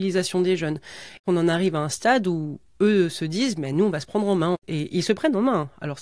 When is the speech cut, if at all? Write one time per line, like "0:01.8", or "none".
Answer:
0:01.2